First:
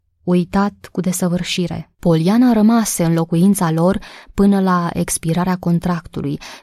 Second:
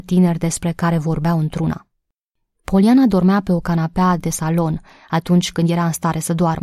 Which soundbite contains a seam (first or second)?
first